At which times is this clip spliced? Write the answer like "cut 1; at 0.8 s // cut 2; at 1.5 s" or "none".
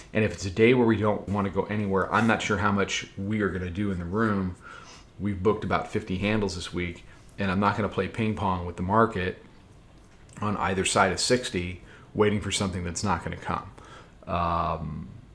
cut 1; at 1.3 s // cut 2; at 14.1 s

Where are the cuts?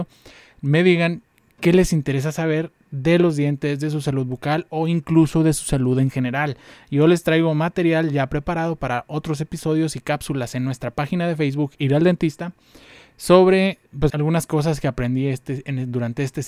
cut 1; at 14.1 s

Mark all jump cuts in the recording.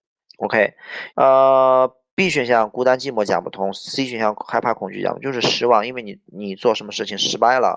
cut 1; at 1.1 s

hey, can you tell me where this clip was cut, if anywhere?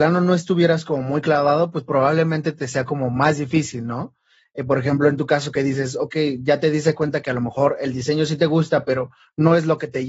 none

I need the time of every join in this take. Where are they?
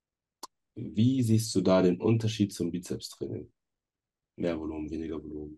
none

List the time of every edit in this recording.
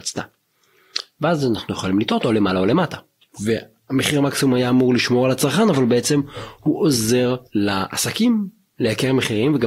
cut 1; at 3.2 s // cut 2; at 7.5 s

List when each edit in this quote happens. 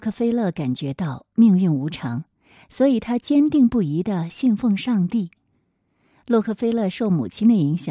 none

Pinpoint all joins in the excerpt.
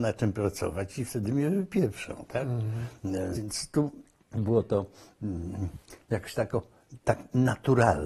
cut 1; at 3.3 s

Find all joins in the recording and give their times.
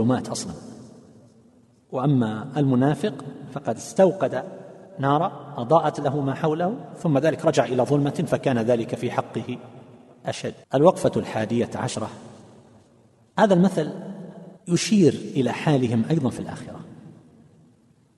cut 1; at 10.6 s // cut 2; at 14.6 s

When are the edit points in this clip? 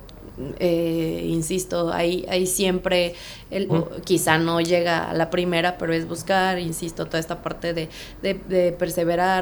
cut 1; at 3.7 s

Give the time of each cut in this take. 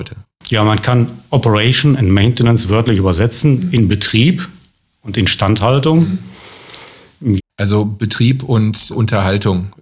cut 1; at 7.4 s // cut 2; at 8.9 s

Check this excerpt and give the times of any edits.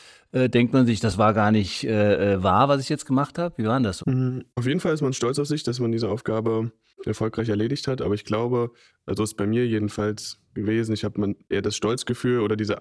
cut 1; at 4.0 s

